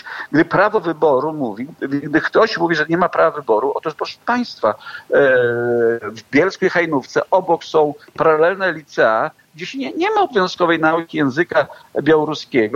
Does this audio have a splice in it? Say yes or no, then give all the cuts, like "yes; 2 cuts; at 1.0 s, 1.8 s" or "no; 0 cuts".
no; 0 cuts